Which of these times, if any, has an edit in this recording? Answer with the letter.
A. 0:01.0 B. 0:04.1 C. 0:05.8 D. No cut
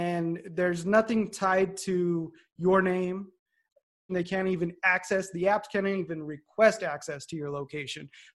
B